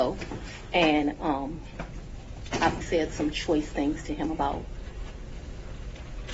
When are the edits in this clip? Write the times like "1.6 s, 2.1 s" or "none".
2.8 s